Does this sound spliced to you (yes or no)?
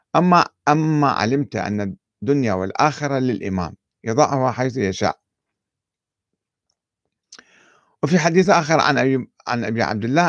no